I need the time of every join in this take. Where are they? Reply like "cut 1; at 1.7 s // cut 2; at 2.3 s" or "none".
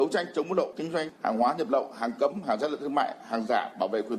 none